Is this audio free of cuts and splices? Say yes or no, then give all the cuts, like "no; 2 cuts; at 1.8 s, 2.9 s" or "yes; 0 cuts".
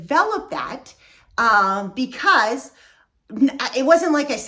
yes; 0 cuts